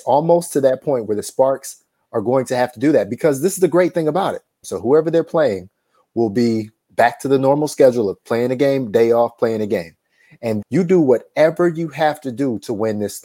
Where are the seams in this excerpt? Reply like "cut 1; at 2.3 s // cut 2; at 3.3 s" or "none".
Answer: cut 1; at 4.6 s // cut 2; at 10.6 s